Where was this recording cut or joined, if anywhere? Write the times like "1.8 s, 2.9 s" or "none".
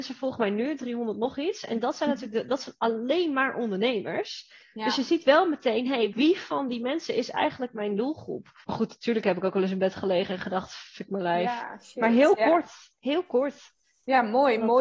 6.1 s, 8.6 s